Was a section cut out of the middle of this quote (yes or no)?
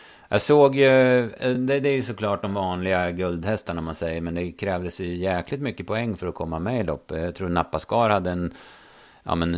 no